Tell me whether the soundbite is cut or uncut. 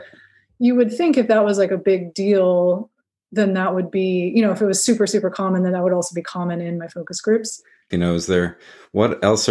cut